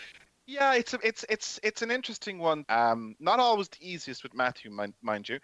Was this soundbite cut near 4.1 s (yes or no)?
no